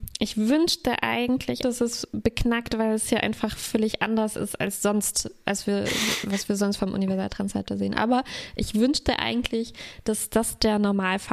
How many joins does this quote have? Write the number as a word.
one